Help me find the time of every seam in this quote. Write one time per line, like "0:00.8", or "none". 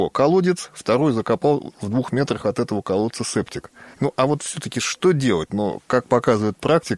0:03.9
0:05.5